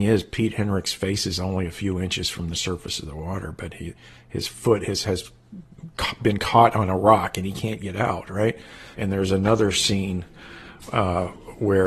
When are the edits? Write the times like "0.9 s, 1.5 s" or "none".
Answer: 8.9 s